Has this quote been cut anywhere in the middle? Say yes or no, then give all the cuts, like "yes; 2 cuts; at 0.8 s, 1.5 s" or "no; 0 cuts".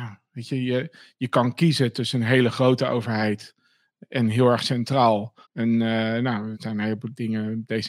yes; 2 cuts; at 5.4 s, 6.5 s